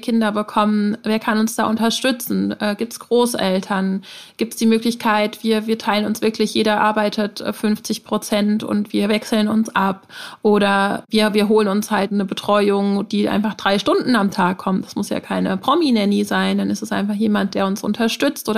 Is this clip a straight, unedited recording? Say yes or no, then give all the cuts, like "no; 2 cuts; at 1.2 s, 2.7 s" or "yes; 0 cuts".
yes; 0 cuts